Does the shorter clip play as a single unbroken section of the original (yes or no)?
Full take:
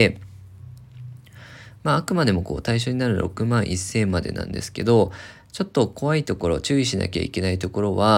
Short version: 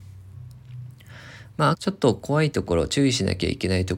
no